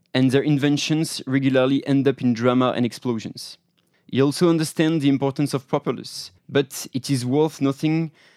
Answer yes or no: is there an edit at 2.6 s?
no